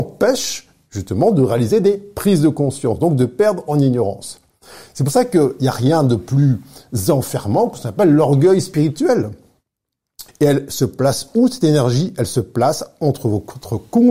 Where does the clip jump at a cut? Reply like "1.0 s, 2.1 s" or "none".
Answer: 10.3 s